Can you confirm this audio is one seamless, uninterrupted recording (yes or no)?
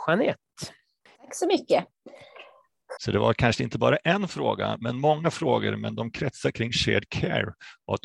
no